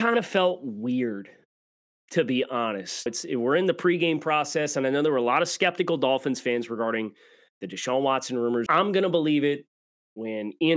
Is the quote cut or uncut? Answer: cut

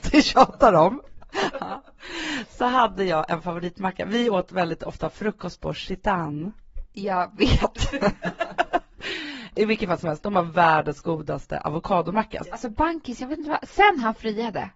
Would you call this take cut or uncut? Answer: cut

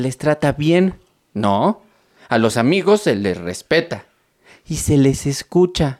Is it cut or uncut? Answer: uncut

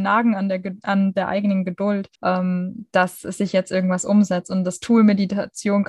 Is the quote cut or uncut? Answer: cut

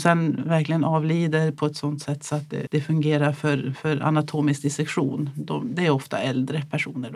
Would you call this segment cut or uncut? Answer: cut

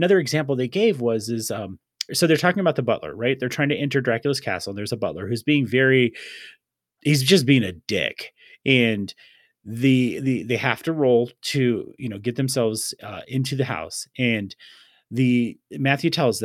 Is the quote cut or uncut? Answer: cut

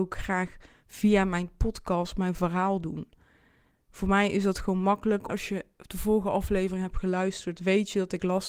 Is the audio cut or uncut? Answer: cut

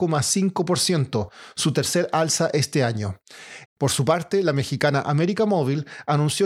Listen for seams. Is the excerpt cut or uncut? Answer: cut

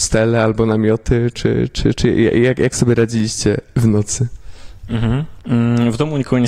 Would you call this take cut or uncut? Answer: uncut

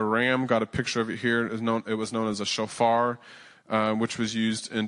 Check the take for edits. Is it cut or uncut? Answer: uncut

